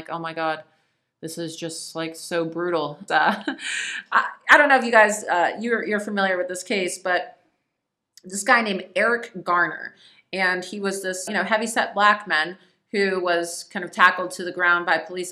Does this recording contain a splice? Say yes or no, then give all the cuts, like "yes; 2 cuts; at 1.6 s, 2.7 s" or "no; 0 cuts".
yes; 2 cuts; at 3.1 s, 11.3 s